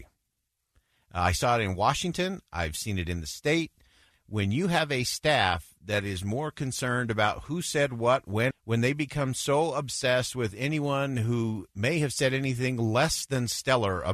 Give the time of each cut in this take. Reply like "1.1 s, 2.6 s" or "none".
4.1 s, 8.5 s